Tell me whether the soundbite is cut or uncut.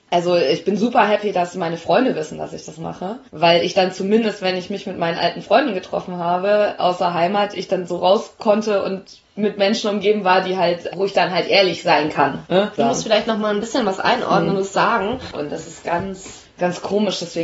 cut